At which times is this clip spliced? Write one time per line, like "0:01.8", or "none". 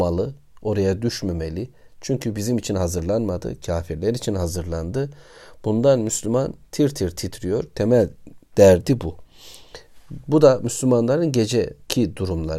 none

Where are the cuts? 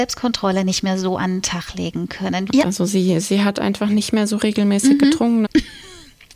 0:02.5
0:05.4

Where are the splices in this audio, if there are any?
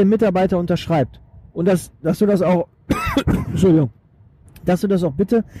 none

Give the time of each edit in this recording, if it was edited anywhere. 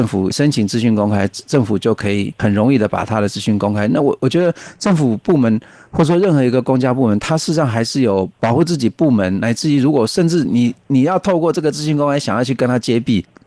none

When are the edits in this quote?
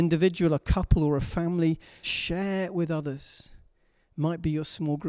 0:02.0

